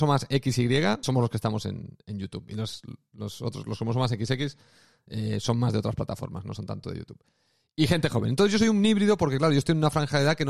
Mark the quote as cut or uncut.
cut